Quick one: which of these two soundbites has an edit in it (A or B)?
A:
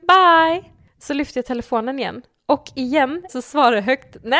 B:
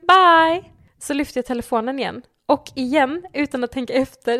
A